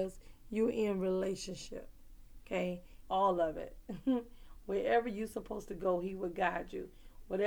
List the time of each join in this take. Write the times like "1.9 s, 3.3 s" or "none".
3.0 s